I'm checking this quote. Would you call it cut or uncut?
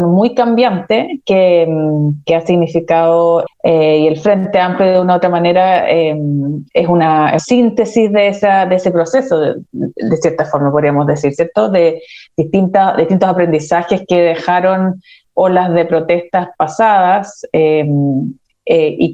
cut